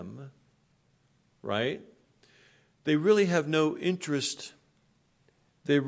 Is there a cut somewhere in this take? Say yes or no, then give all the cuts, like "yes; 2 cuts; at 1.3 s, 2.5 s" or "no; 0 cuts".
no; 0 cuts